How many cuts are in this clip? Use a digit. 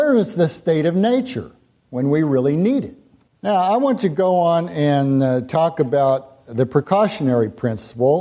1